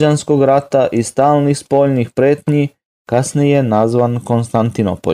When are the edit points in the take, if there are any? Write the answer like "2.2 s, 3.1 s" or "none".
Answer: 2.9 s